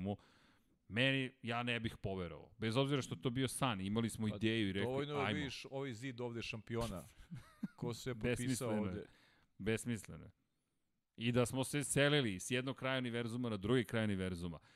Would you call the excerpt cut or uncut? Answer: uncut